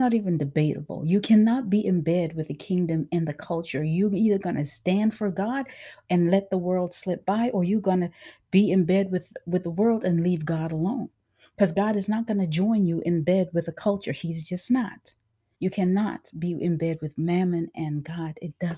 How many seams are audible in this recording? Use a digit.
1